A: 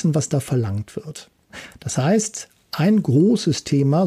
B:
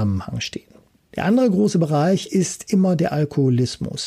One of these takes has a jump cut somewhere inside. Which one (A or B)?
B